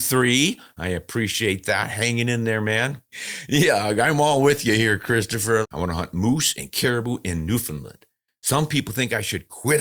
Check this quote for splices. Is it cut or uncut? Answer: cut